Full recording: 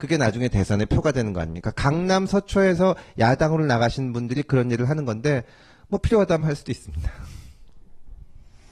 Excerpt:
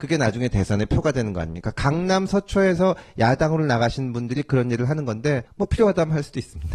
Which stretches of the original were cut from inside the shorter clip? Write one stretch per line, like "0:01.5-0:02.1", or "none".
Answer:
0:05.5-0:05.8